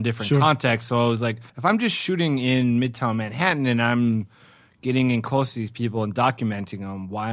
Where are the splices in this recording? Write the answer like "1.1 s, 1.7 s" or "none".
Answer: 1.5 s

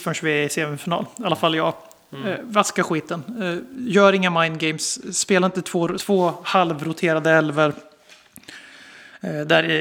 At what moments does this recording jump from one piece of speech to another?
6.0 s

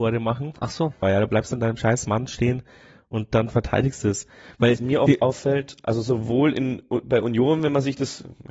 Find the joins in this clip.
1.0 s

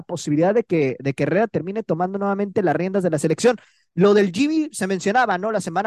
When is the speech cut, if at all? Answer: none

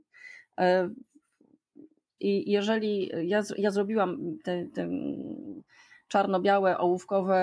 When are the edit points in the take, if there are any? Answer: 2.2 s

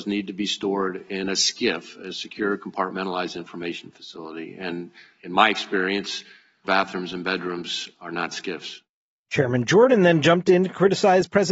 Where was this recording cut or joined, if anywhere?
6.6 s

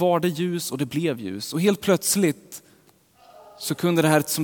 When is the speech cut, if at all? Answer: none

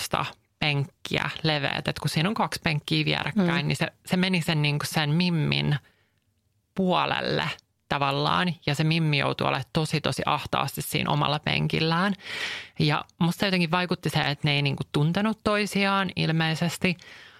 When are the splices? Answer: none

